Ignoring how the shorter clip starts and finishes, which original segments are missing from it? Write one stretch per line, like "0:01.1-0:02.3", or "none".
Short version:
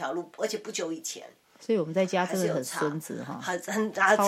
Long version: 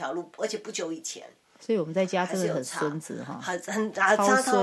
none